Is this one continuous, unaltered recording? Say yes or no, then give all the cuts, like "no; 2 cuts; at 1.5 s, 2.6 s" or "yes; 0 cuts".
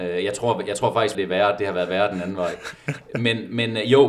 no; 1 cut; at 1.1 s